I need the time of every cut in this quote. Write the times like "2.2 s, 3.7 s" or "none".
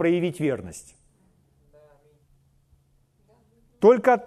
none